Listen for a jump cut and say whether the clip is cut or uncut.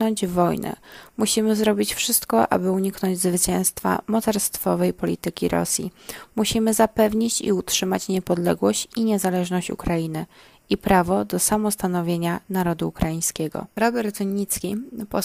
uncut